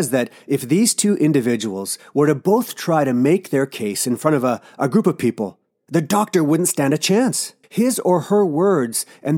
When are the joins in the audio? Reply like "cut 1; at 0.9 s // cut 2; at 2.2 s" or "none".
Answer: cut 1; at 7.6 s